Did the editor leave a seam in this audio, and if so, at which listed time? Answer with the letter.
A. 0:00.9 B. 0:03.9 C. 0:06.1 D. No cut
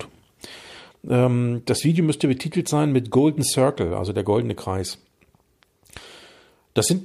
A